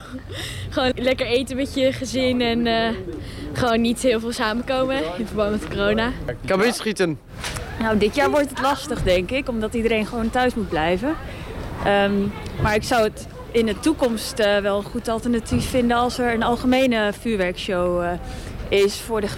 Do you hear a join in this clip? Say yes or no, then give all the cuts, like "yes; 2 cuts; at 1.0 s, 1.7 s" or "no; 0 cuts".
yes; 1 cut; at 0.9 s